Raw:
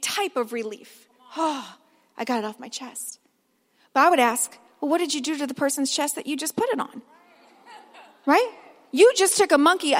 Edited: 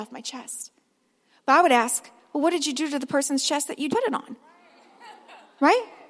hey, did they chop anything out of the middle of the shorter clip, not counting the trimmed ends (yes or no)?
yes